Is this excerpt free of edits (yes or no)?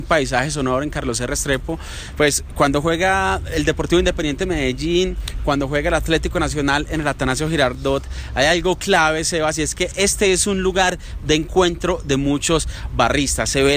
yes